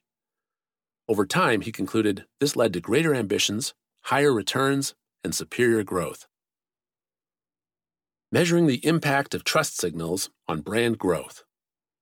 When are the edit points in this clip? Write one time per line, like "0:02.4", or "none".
none